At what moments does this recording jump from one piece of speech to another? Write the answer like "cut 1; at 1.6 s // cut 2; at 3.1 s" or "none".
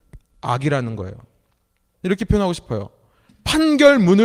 cut 1; at 1.9 s